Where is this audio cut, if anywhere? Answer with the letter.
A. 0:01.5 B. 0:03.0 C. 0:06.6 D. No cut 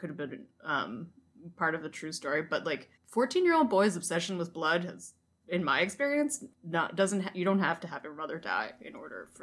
B